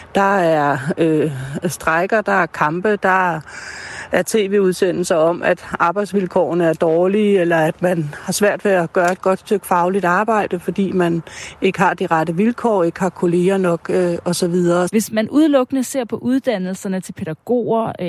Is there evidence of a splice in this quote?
yes; 1 cut; at 14.9 s

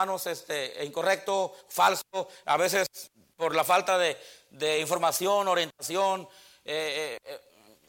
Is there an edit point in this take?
no; 0 cuts

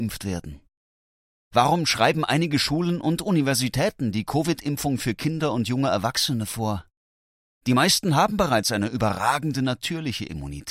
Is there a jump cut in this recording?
no; 0 cuts

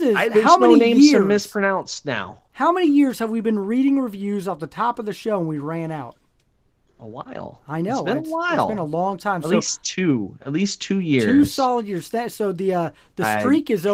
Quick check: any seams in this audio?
no; 0 cuts

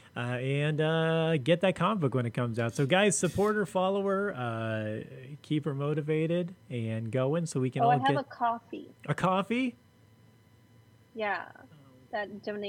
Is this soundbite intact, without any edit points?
no; 1 cut; at 9.0 s

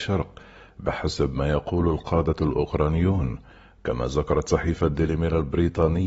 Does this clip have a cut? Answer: no; 0 cuts

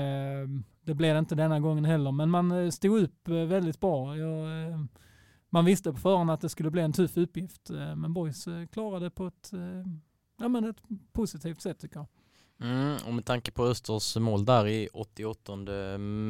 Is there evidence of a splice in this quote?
no; 0 cuts

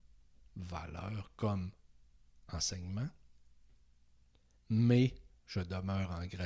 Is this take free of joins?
no; 1 cut; at 4.6 s

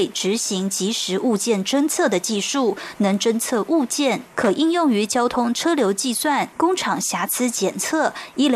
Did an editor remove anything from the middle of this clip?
yes; 2 cuts; at 4.3 s, 6.5 s

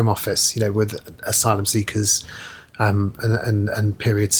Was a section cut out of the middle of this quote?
yes; 1 cut; at 3.2 s

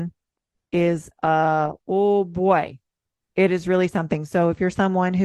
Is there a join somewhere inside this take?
no; 0 cuts

